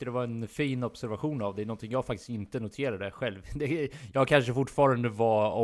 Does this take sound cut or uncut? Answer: uncut